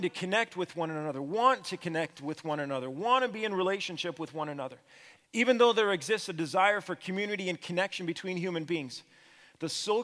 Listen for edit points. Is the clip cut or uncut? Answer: cut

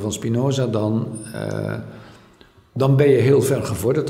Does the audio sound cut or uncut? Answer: uncut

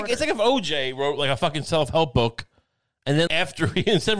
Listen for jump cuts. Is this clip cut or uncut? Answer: cut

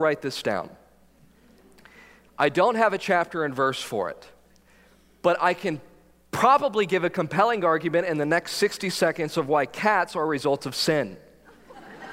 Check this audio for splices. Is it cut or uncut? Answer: uncut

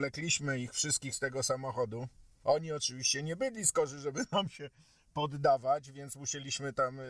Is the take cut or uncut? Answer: cut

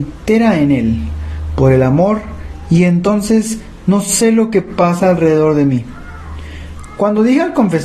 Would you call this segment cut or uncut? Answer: uncut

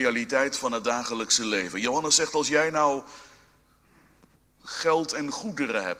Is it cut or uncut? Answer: uncut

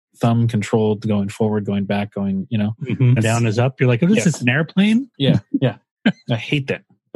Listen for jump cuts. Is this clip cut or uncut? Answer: cut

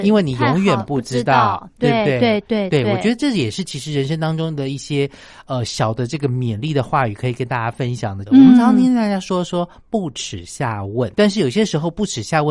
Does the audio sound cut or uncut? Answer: cut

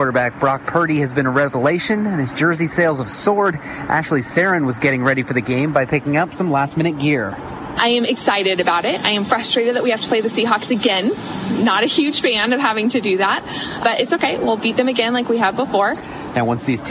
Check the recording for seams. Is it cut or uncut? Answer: cut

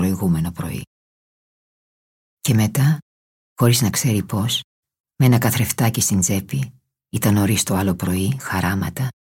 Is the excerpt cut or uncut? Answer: cut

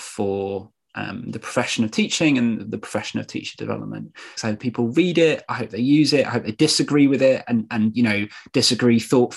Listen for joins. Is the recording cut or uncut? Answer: cut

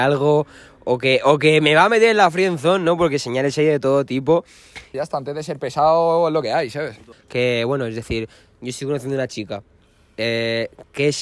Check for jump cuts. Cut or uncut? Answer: cut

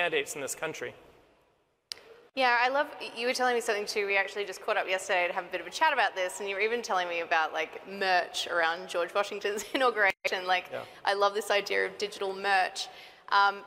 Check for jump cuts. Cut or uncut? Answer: uncut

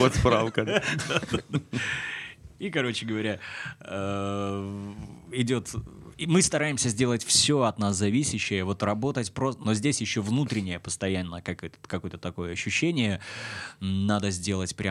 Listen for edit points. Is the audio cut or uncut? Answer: cut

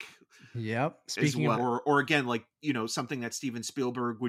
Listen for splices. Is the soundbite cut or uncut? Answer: cut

